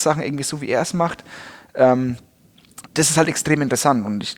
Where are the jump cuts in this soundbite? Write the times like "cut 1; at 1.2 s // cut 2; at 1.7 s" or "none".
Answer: cut 1; at 2.9 s